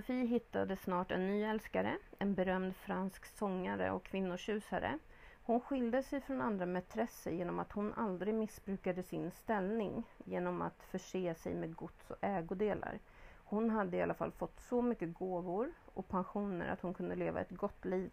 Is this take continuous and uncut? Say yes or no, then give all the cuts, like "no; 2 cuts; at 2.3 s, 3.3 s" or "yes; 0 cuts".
no; 1 cut; at 5.4 s